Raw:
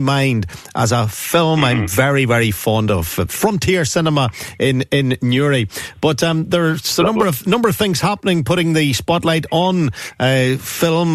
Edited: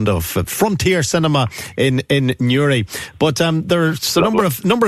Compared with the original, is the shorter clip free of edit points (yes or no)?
yes